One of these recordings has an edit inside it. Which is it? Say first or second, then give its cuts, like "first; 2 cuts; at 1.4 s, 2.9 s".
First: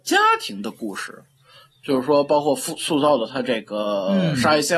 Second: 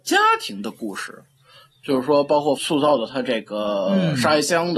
second; 1 cut; at 2.6 s